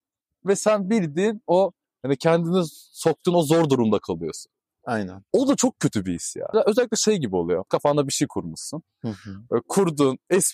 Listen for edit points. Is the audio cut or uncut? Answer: cut